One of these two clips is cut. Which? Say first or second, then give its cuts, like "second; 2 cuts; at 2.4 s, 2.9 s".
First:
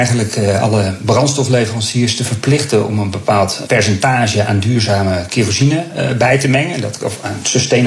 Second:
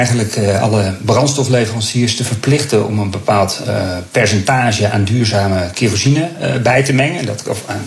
first; 1 cut; at 3.6 s